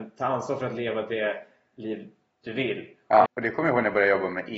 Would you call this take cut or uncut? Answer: cut